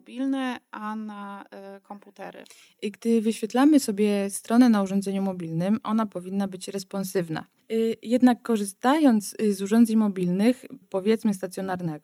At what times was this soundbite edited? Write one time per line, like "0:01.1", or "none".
0:07.6
0:10.8

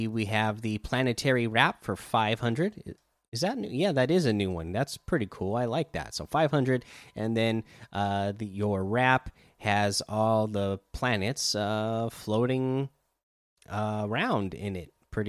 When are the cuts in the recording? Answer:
none

